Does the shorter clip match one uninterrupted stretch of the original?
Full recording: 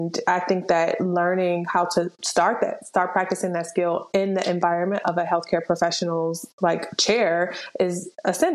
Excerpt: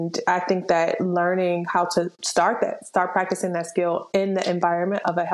yes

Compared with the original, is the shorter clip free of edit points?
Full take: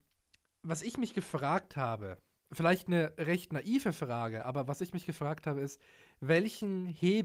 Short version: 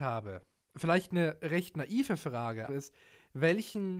no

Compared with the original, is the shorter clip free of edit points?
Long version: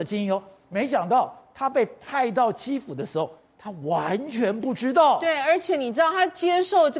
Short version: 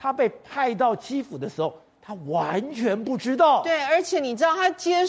yes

